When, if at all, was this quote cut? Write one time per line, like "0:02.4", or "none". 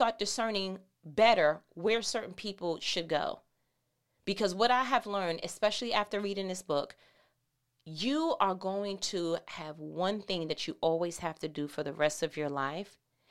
none